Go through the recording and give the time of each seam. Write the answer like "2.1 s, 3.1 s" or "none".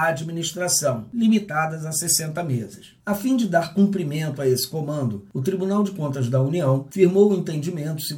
3.0 s